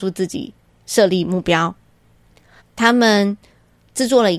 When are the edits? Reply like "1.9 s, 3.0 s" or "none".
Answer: 2.6 s